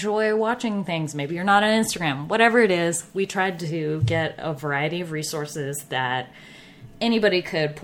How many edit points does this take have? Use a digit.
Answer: 0